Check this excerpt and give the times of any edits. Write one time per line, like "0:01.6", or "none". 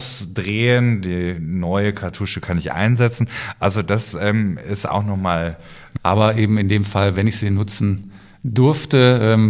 0:06.0